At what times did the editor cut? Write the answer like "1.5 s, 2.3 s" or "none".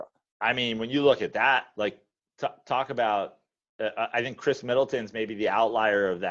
none